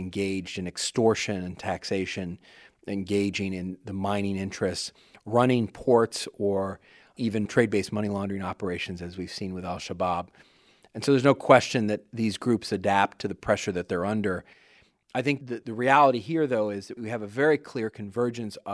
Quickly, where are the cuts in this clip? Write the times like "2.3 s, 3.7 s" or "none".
none